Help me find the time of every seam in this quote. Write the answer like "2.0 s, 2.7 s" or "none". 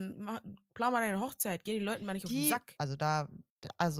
2.8 s